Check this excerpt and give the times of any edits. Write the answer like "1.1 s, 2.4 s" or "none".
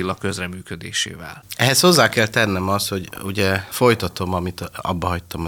none

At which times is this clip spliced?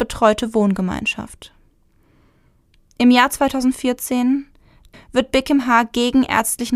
4.9 s

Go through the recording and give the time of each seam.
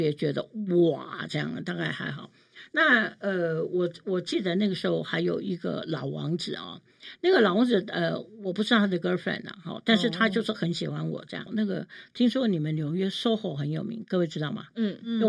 11.5 s

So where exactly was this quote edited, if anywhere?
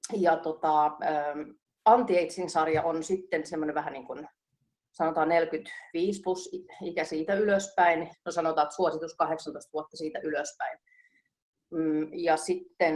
8.1 s

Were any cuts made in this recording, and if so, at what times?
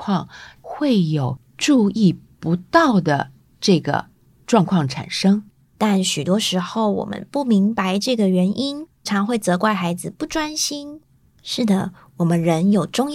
5.7 s, 9.1 s, 11.3 s

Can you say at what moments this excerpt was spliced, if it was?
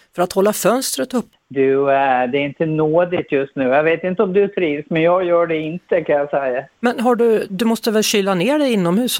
1.3 s

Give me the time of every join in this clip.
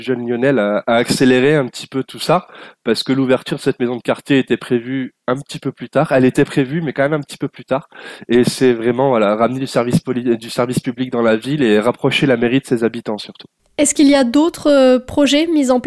none

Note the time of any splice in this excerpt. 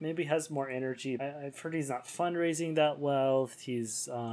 1.2 s

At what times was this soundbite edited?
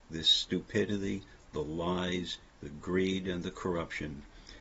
none

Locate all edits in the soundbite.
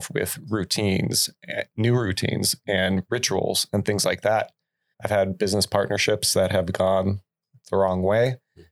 4.9 s

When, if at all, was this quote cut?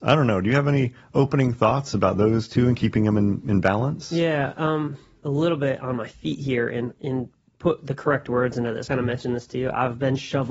5.2 s, 8.9 s

